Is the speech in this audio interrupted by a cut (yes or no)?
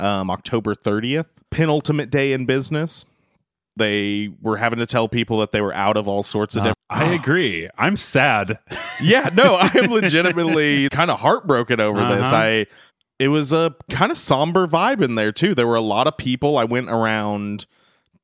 yes